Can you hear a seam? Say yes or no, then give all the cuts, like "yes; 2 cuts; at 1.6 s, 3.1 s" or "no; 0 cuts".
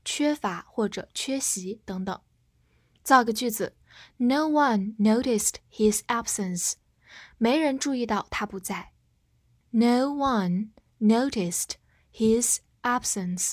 yes; 1 cut; at 9.6 s